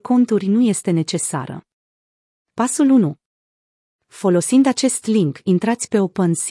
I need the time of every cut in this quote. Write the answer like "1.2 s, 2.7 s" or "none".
none